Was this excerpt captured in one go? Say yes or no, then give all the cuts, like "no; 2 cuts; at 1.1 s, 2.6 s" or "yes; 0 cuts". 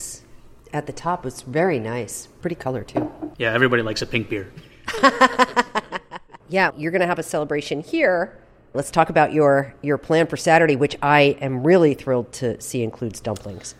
no; 1 cut; at 6.7 s